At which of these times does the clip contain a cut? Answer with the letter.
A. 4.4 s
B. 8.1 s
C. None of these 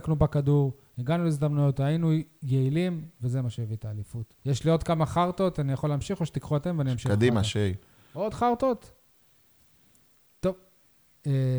A